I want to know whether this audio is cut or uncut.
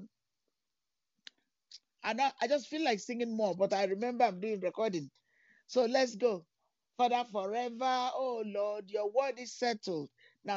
uncut